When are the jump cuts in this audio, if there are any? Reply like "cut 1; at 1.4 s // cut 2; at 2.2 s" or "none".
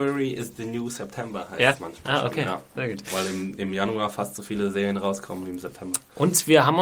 none